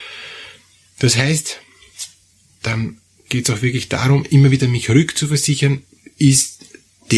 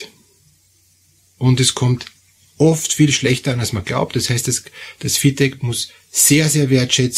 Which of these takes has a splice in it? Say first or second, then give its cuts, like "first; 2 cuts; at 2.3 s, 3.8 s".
first; 1 cut; at 2.5 s